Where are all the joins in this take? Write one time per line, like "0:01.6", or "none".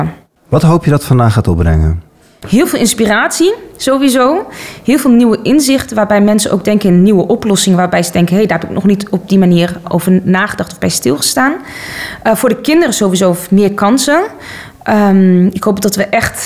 0:09.8